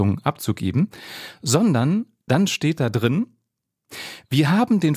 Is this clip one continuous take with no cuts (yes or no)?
yes